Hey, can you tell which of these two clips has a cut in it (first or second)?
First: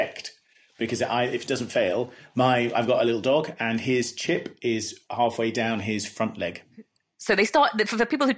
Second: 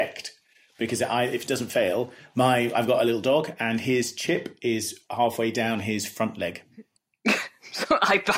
second